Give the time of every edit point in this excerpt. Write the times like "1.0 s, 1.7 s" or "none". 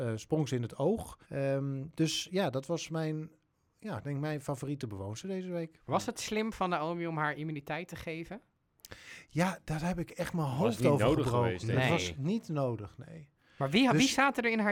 1.2 s